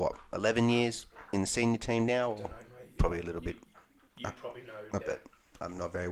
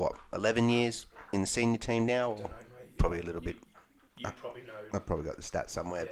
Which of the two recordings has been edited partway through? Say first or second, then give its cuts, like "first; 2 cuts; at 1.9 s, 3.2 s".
first; 1 cut; at 5.0 s